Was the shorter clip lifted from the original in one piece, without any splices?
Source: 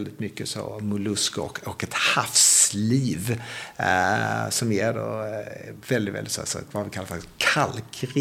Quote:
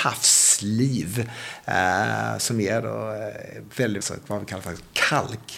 no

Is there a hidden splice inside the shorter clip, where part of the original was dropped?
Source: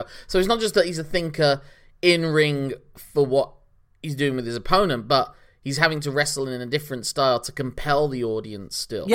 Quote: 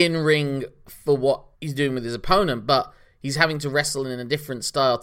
yes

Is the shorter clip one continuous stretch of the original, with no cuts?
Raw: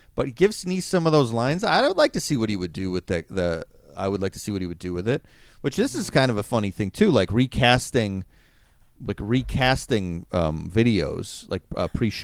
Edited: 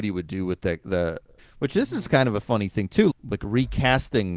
no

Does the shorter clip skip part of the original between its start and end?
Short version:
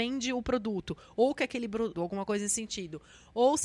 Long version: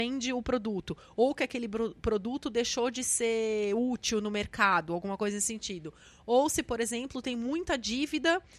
yes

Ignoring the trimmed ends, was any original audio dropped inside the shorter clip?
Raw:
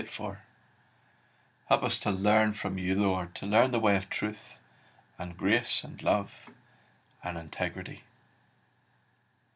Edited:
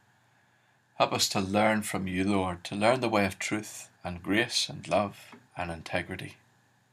yes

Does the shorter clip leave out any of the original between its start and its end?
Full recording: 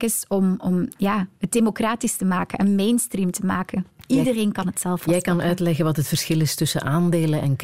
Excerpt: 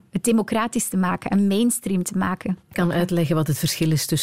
yes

